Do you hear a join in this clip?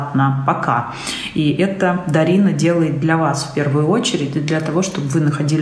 no; 0 cuts

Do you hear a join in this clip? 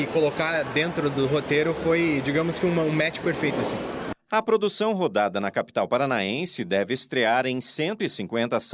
no; 0 cuts

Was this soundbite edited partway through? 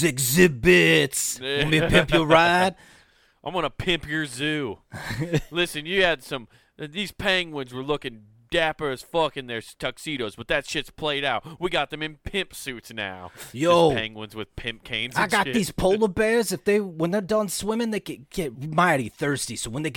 no; 0 cuts

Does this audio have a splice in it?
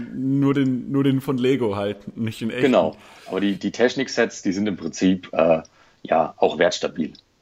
no; 0 cuts

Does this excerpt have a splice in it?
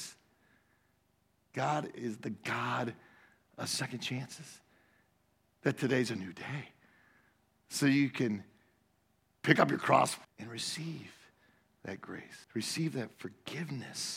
yes; 2 cuts; at 10.2 s, 12.4 s

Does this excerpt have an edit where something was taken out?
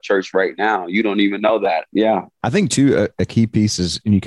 yes; 2 cuts; at 1.9 s, 3.1 s

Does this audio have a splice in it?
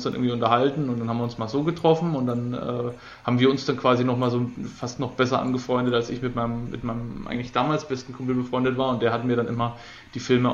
no; 0 cuts

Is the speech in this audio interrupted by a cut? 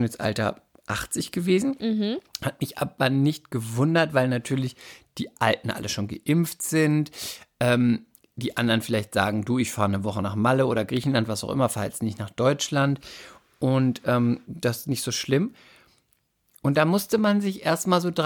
no; 0 cuts

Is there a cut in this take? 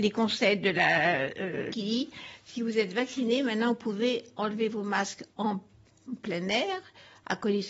yes; 2 cuts; at 1.7 s, 5.3 s

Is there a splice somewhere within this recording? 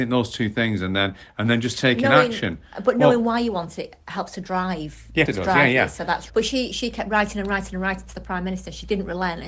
yes; 2 cuts; at 5.3 s, 6.3 s

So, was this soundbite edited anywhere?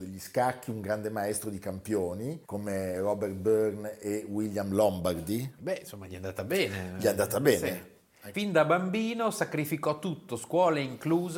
yes; 3 cuts; at 2.4 s, 5.6 s, 8.3 s

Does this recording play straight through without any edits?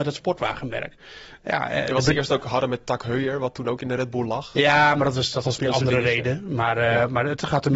yes; 0 cuts

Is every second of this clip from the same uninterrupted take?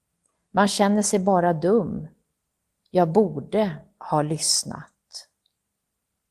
yes; 0 cuts

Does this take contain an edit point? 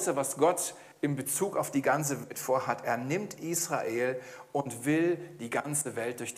no; 0 cuts

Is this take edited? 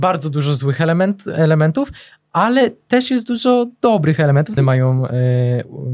yes; 1 cut; at 4.6 s

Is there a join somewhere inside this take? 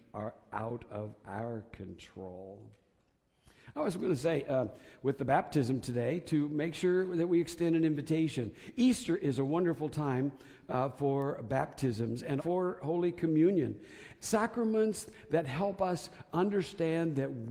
yes; 2 cuts; at 12.4 s, 14.2 s

